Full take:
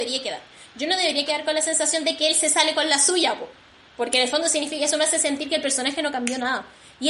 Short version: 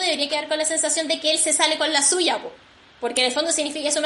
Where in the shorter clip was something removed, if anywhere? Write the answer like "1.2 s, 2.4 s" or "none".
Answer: none